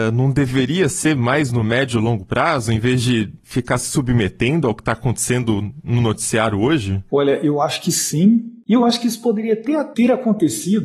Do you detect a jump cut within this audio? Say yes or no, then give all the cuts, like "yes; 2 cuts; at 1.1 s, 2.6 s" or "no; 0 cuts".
no; 0 cuts